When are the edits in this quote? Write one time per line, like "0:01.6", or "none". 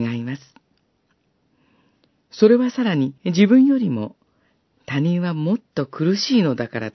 0:03.2